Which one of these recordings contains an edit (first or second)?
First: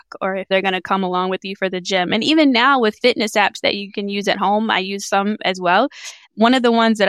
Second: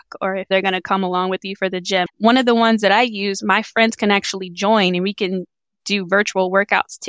second